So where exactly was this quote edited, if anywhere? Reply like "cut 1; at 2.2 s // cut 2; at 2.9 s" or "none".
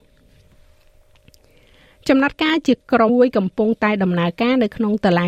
cut 1; at 3.1 s